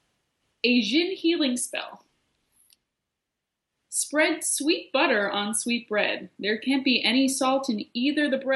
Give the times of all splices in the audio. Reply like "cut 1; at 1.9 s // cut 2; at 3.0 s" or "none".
none